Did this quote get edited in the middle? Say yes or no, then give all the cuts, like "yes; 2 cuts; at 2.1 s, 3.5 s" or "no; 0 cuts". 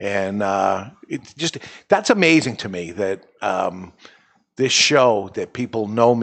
no; 0 cuts